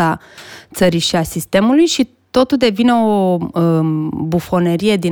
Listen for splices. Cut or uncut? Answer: uncut